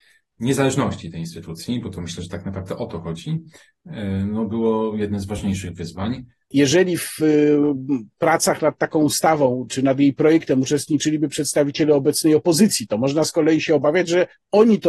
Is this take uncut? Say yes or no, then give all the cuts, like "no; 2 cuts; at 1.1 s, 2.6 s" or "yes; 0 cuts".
no; 2 cuts; at 6.5 s, 9.7 s